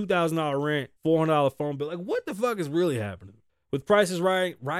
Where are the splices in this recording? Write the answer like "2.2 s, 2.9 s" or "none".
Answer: 1.0 s, 3.5 s